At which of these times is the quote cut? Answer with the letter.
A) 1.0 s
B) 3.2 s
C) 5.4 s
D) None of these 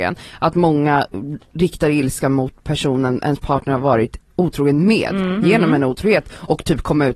C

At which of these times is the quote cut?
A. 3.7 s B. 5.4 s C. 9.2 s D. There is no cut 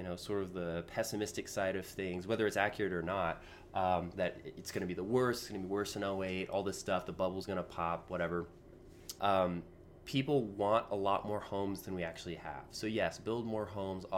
C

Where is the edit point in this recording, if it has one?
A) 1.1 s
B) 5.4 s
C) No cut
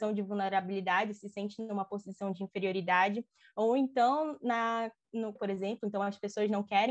B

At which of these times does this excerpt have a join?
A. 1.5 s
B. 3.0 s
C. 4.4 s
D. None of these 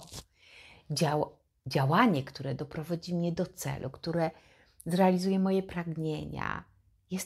D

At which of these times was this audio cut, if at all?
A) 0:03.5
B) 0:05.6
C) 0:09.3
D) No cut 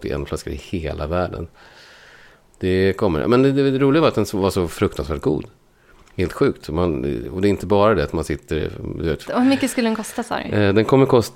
C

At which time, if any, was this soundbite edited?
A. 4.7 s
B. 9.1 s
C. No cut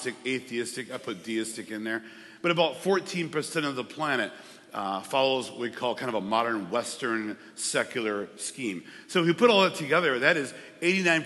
C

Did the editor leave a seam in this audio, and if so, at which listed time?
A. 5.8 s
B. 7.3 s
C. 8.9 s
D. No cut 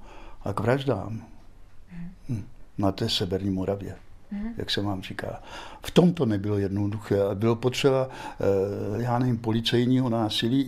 D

